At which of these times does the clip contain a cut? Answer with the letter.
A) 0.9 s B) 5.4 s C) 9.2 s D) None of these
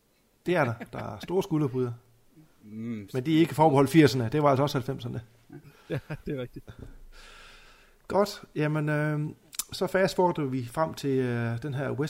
D